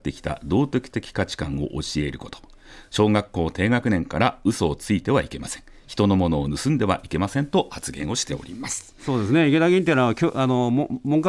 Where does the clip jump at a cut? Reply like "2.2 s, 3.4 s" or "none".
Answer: none